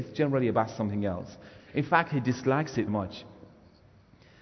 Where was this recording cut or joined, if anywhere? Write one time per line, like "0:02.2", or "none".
0:01.6
0:02.9